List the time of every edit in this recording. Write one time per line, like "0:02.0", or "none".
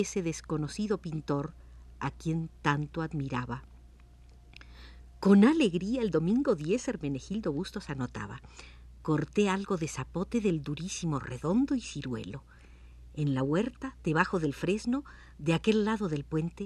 none